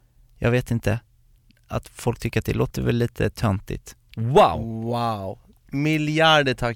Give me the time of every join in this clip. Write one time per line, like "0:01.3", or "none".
0:04.1